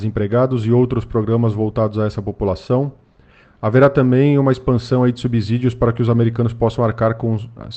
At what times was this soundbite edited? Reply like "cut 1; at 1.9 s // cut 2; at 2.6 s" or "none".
cut 1; at 3.4 s